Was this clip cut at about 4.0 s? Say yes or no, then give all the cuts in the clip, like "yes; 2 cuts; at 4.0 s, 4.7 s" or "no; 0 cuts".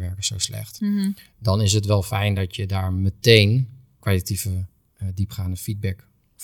yes; 1 cut; at 4.0 s